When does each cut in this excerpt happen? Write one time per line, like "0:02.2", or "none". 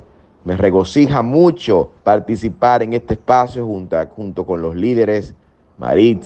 0:02.0